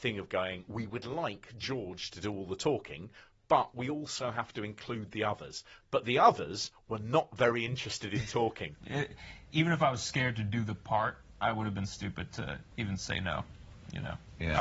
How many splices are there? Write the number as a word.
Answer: one